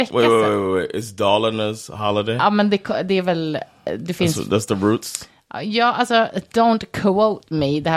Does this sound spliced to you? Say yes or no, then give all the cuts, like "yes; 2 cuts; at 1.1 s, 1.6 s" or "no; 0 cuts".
no; 0 cuts